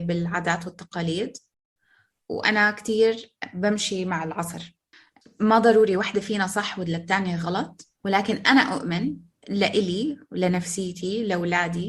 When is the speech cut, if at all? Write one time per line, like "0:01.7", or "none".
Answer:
0:08.0